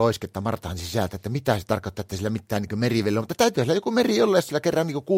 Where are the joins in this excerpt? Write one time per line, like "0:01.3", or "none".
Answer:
none